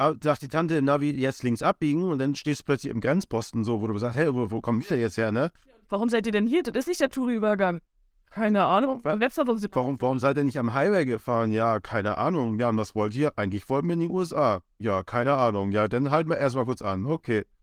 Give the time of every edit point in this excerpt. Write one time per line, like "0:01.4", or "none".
0:05.8